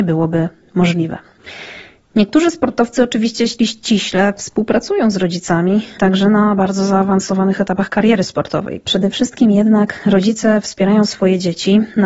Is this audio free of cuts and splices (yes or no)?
no